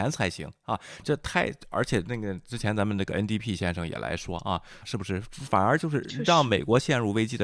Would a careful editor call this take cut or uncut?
cut